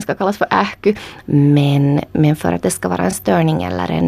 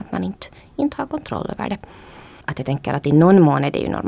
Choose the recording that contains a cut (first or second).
first